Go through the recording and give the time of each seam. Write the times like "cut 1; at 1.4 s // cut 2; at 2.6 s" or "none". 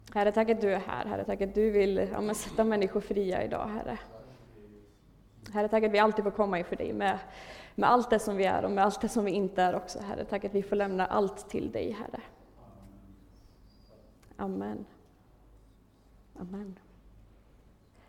cut 1; at 1.3 s